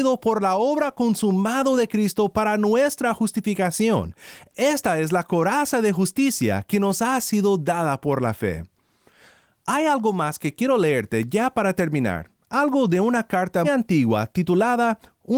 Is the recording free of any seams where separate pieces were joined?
no; 1 cut; at 13.6 s

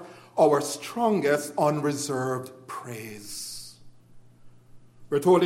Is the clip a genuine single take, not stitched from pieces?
yes; 0 cuts

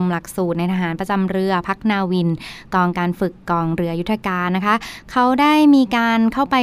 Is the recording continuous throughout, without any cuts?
yes; 0 cuts

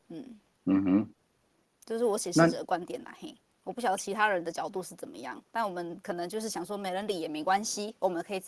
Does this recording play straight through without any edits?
yes; 0 cuts

